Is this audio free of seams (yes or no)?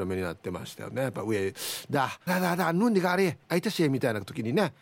no